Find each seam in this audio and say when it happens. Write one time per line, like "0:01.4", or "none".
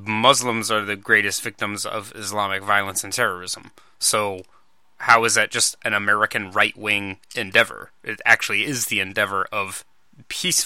none